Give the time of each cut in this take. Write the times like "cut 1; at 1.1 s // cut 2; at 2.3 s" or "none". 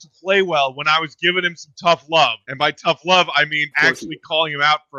cut 1; at 2.4 s // cut 2; at 3.7 s